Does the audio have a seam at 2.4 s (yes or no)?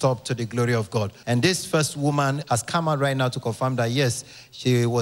yes